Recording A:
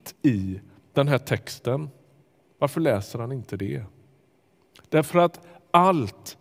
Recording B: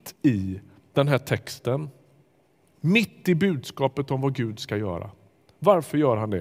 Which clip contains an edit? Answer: A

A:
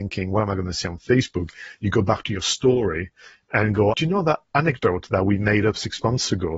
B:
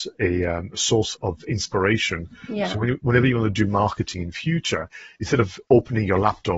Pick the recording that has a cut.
A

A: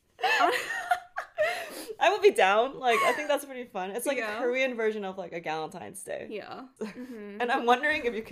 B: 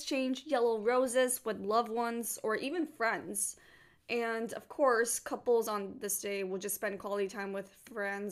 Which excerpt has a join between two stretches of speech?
A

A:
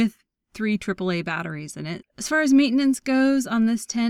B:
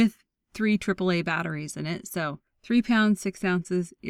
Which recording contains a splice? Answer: A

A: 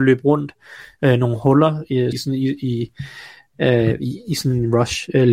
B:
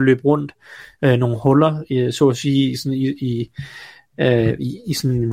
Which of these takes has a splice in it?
A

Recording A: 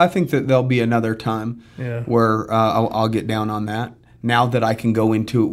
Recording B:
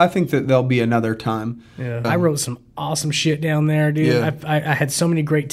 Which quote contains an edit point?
B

